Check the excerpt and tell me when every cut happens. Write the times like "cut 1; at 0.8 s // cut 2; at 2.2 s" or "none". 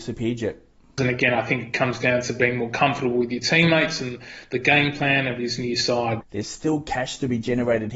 cut 1; at 1.0 s // cut 2; at 6.2 s